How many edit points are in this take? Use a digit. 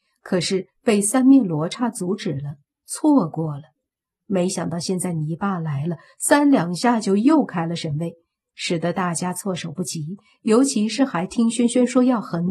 0